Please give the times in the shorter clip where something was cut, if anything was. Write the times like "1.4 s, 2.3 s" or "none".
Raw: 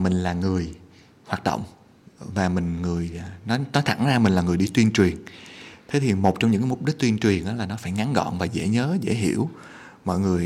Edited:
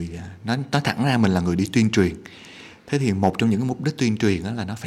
none